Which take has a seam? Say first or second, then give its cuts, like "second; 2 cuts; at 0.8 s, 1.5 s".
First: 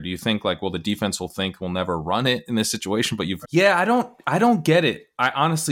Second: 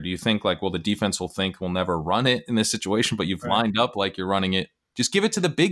first; 1 cut; at 3.4 s